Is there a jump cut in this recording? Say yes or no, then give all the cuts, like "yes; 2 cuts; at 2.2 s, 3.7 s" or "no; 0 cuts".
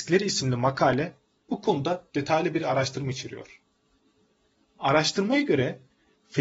no; 0 cuts